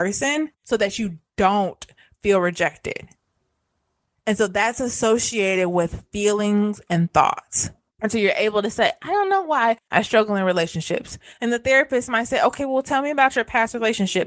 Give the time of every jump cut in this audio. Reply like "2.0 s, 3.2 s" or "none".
7.9 s